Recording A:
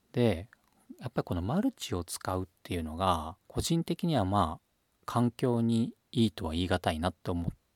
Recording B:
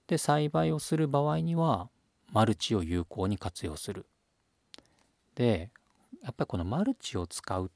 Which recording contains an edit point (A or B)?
A